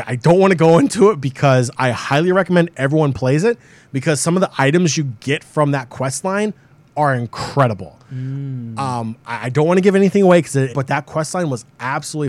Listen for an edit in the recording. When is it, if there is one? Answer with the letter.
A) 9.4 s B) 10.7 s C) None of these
B